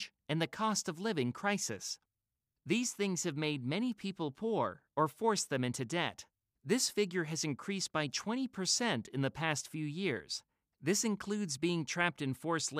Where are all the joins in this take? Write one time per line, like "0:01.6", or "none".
0:06.5
0:10.7